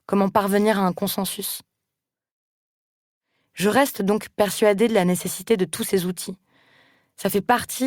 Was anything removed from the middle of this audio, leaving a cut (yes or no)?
no